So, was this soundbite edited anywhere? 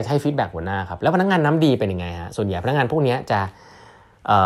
no; 0 cuts

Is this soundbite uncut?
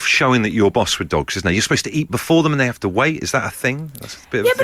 yes; 0 cuts

